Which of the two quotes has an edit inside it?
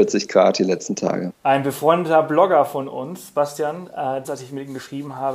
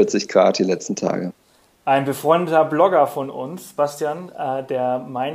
first; 2 cuts; at 1.4 s, 4.2 s

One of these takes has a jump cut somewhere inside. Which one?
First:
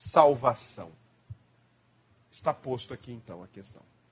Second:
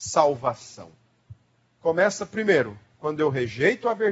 second; 1 cut; at 1.8 s

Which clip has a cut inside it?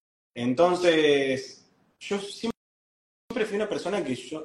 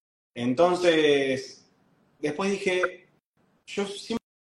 first; 1 cut; at 1.9 s

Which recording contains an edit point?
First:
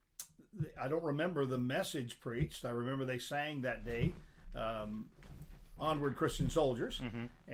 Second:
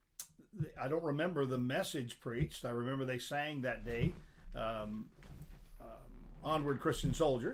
first; 1 cut; at 5.8 s

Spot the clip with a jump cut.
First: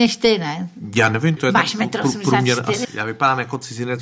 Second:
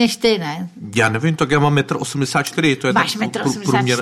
first; 2 cuts; at 1.4 s, 2.8 s

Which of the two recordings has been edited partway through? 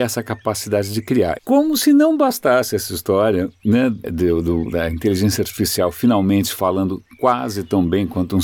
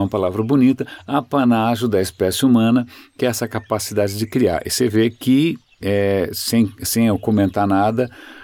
first; 2 cuts; at 1.4 s, 4.0 s

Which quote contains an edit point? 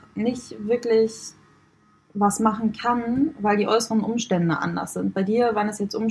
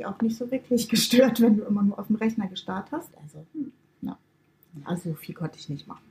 second; 1 cut; at 3.1 s

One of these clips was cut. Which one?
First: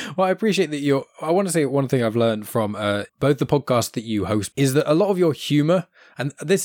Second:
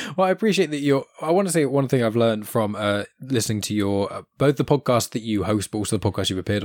first; 2 cuts; at 3.1 s, 4.5 s

